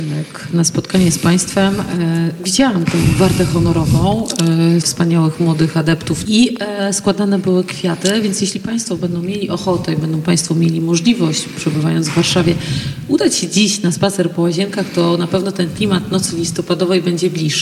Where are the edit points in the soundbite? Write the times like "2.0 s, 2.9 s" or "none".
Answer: 4.8 s, 6.2 s